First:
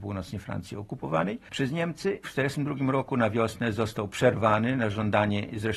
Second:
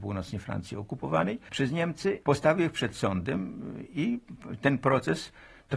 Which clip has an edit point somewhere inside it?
first; 1 cut; at 2.2 s

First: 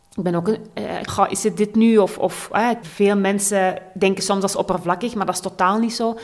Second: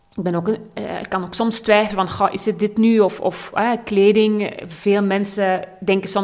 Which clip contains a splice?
first; 2 cuts; at 1.1 s, 2.8 s

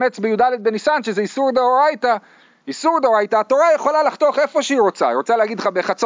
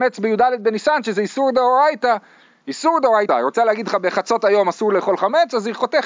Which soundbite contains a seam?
second; 1 cut; at 3.3 s

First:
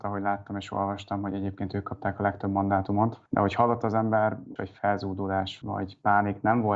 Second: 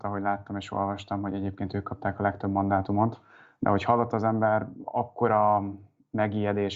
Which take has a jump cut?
first; 3 cuts; at 3.3 s, 4.6 s, 5.6 s

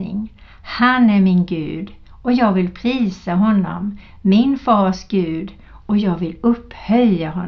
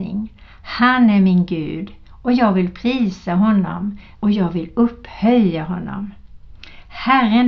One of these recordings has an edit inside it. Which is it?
second; 1 cut; at 4.1 s

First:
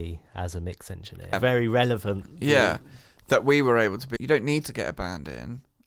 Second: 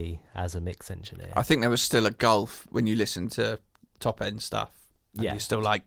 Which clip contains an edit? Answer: first; 2 cuts; at 1.3 s, 4.2 s

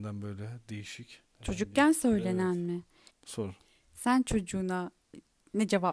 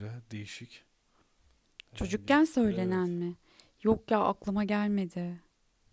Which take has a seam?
first; 2 cuts; at 1.3 s, 3.1 s

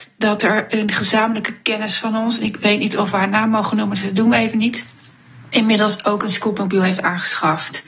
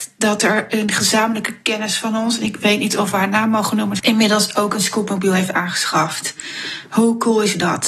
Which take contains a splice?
second; 1 cut; at 4.0 s

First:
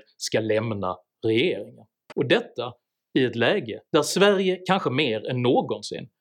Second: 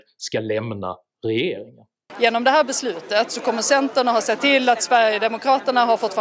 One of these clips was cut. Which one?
first; 2 cuts; at 2.1 s, 3.9 s

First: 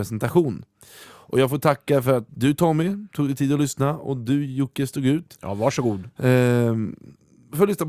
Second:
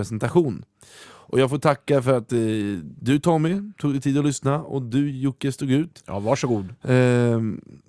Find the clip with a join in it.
first; 1 cut; at 2.3 s

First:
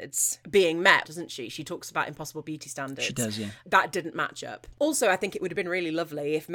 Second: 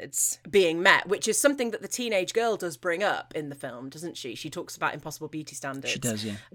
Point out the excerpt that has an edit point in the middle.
first; 1 cut; at 1.0 s

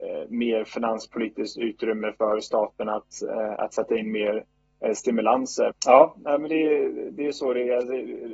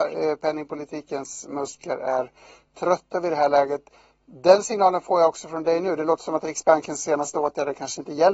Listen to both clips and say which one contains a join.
first; 1 cut; at 5.7 s

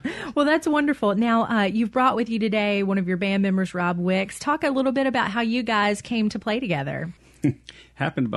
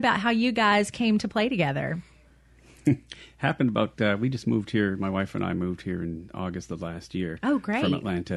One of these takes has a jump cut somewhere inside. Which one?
first; 1 cut; at 7.2 s

